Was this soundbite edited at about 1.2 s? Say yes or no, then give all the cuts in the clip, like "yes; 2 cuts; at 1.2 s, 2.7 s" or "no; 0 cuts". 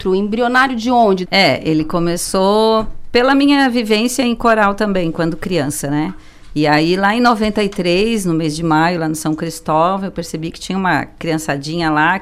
yes; 1 cut; at 1.2 s